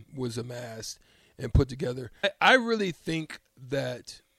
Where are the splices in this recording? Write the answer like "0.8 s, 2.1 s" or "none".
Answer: 2.2 s